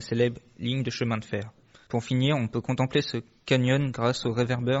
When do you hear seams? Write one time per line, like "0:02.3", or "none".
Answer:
0:01.9